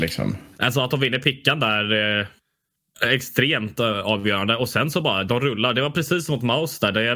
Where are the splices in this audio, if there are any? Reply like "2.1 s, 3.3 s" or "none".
none